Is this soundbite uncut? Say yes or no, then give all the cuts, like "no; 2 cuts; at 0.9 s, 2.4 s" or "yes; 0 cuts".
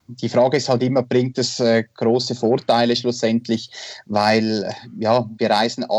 yes; 0 cuts